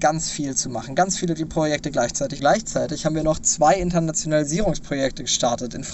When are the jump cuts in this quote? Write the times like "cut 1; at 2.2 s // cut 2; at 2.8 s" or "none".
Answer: cut 1; at 2.4 s